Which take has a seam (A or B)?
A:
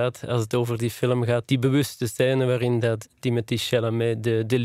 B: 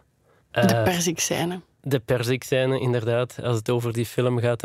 A